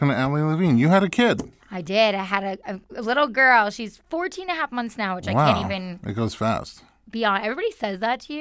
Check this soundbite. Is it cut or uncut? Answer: cut